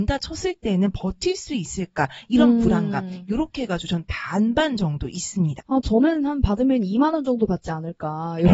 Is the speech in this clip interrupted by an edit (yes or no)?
yes